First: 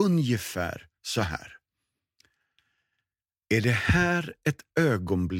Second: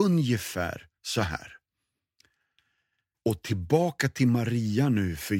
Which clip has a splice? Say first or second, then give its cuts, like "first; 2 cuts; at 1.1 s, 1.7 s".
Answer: second; 1 cut; at 3.1 s